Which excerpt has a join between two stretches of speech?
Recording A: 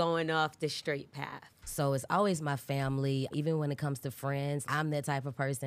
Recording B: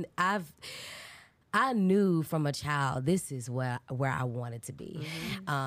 A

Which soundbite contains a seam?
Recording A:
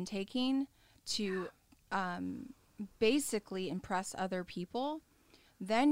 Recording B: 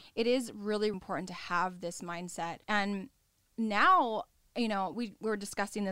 B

